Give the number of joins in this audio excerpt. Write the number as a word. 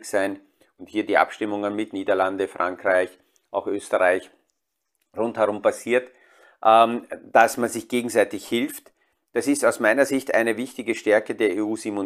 zero